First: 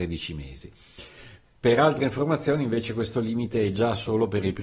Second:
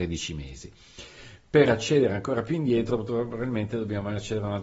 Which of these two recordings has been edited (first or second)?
first